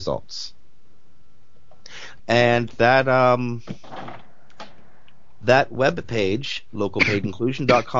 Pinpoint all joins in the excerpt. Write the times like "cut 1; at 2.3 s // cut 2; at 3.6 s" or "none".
cut 1; at 2.2 s